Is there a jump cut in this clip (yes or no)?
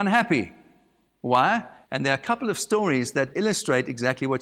yes